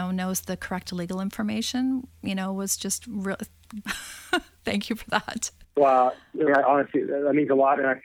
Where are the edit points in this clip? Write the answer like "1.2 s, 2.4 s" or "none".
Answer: 3.8 s, 6.5 s